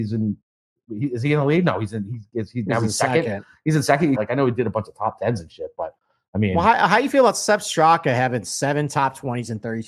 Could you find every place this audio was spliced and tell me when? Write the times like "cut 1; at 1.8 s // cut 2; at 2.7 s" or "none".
cut 1; at 4.1 s